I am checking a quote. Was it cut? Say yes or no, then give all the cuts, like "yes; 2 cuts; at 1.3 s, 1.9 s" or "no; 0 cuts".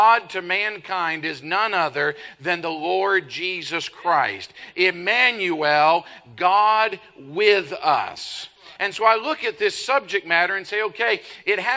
yes; 1 cut; at 8.8 s